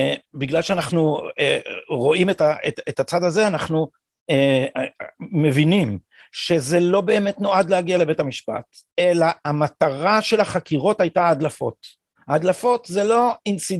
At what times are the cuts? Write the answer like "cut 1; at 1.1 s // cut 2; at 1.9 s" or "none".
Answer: none